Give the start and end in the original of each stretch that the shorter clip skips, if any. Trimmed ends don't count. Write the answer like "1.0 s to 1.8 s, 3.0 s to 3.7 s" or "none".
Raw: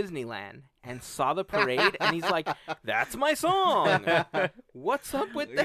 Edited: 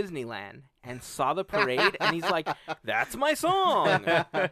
none